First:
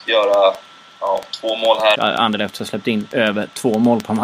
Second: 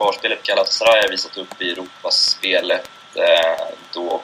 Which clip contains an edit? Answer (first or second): first